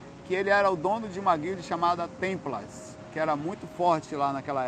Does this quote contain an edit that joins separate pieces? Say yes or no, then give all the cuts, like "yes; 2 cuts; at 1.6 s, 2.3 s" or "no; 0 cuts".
no; 0 cuts